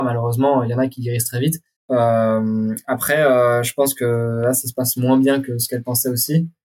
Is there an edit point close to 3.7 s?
no; 1 cut; at 1.8 s

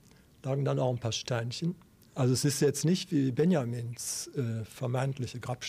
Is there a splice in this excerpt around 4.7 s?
no; 1 cut; at 2.1 s

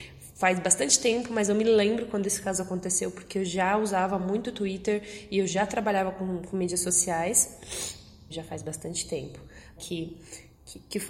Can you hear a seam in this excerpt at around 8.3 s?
yes; 2 cuts; at 8.3 s, 9.8 s

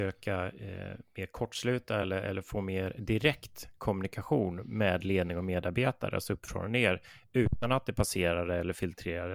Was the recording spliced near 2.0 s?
no; 0 cuts

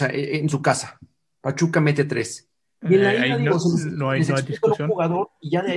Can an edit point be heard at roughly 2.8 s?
yes; 1 cut; at 2.8 s

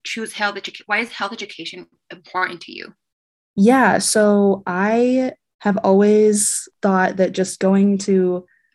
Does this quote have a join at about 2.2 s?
no; 3 cuts; at 3.5 s, 5.5 s, 6.7 s

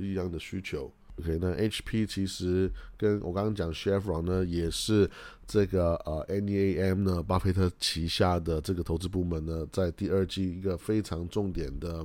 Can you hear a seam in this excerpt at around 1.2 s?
yes; 1 cut; at 1.2 s

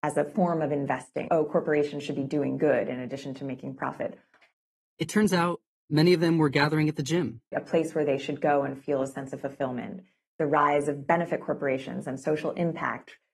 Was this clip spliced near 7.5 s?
yes; 3 cuts; at 1.3 s, 4.4 s, 7.5 s

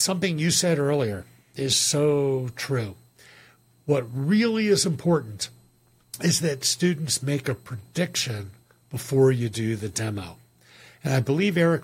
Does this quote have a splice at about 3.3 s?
no; 0 cuts

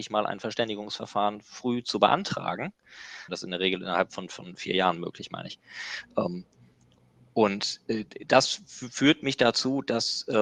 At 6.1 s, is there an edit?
no; 1 cut; at 3.3 s

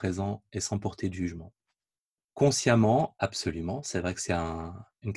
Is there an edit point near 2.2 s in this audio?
yes; 1 cut; at 2.2 s

